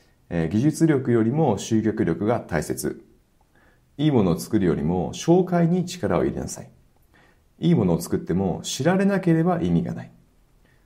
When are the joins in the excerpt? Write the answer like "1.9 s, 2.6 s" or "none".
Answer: none